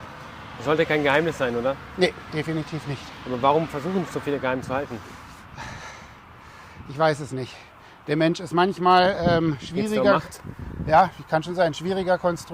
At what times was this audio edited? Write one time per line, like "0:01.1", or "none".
none